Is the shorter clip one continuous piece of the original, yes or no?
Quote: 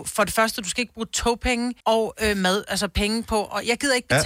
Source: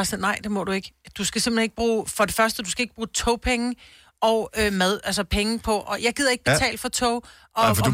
no